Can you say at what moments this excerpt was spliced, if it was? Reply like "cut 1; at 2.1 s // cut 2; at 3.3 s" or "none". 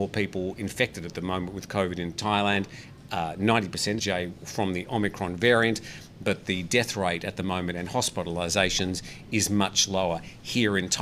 cut 1; at 4.0 s